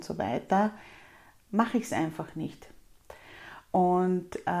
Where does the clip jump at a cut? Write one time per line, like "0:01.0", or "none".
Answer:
none